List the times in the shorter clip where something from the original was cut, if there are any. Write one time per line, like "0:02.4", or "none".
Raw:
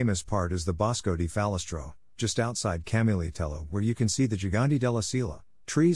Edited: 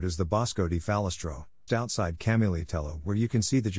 0:01.7